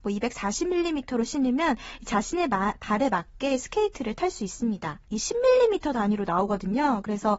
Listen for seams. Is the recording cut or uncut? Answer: cut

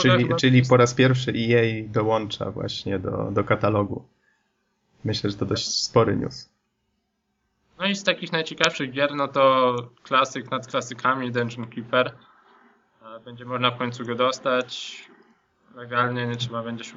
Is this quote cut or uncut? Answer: uncut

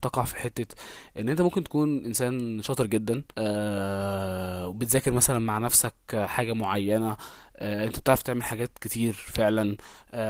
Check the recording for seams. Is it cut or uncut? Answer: cut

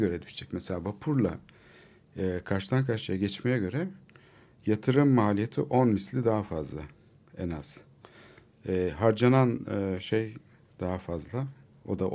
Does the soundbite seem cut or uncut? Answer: uncut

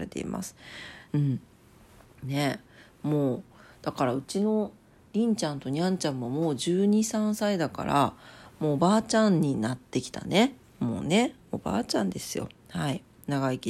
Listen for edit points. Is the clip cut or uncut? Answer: cut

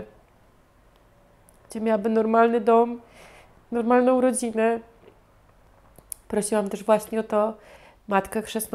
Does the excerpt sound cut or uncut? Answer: uncut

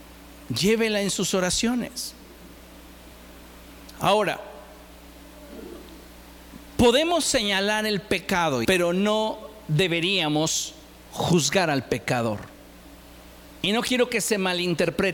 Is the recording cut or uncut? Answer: cut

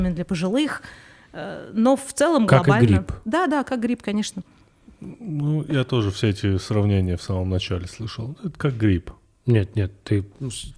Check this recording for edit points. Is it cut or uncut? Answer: uncut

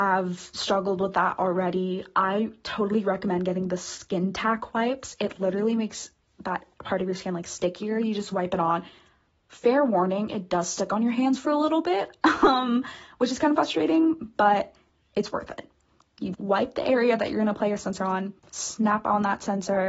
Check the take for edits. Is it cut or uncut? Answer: cut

